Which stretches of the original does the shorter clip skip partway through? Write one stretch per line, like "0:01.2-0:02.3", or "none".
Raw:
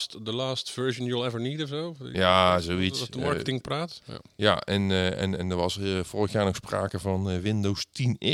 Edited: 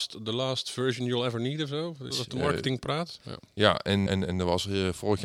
0:02.1-0:02.9
0:04.9-0:05.2